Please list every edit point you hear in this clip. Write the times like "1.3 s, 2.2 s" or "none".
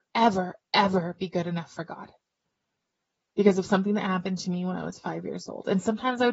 none